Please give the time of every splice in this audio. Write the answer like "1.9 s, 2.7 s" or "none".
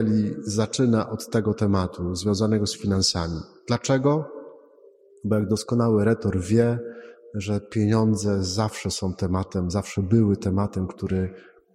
none